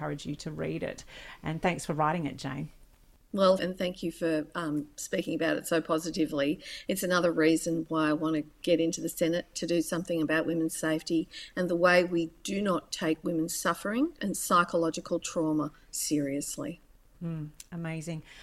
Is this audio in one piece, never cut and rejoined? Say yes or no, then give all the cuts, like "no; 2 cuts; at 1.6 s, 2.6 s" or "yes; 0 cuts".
no; 2 cuts; at 3.6 s, 14.2 s